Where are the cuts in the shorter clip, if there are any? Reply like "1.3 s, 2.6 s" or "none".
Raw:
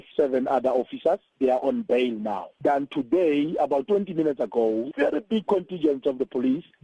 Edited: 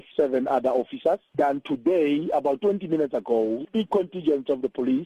1.3 s, 3.7 s